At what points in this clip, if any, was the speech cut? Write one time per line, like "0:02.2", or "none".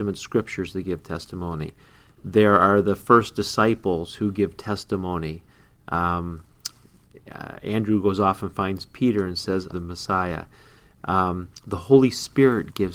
0:09.7